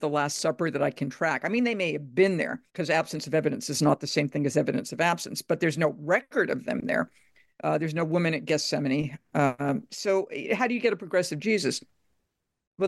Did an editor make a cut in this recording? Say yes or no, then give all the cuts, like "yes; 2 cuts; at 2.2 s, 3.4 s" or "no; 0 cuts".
yes; 1 cut; at 2.7 s